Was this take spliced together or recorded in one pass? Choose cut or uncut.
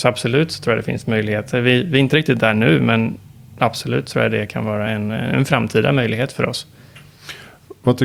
uncut